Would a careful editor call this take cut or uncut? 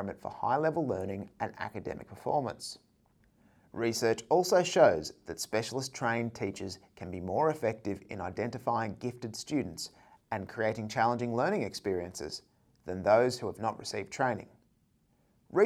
uncut